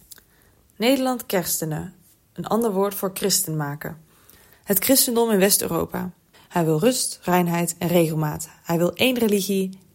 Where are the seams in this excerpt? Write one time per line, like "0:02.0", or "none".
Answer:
0:04.5
0:06.3